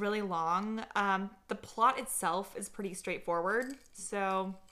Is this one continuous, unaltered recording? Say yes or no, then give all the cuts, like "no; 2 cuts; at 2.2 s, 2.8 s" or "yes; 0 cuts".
yes; 0 cuts